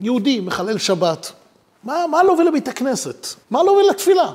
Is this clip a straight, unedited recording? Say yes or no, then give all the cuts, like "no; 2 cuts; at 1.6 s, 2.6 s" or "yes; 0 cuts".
no; 1 cut; at 3.4 s